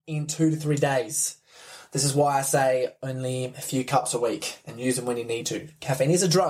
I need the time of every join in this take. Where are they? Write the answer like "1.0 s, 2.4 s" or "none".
none